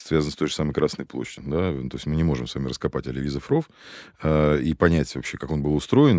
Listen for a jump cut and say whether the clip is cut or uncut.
cut